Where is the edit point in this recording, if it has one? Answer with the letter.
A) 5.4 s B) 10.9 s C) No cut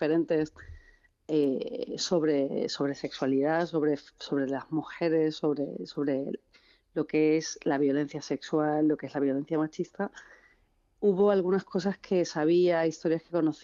C